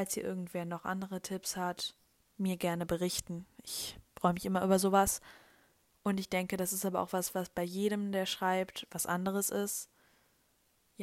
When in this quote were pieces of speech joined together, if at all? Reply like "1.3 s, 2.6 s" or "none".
none